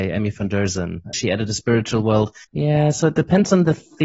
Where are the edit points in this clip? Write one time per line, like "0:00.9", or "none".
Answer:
0:01.1
0:02.4